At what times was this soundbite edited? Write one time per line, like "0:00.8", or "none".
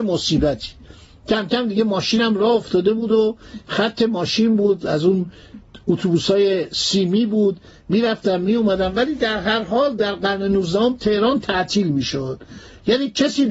none